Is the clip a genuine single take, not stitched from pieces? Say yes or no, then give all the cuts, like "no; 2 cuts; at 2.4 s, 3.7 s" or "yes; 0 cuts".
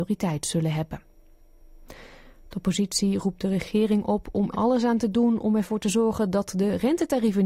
no; 1 cut; at 4.5 s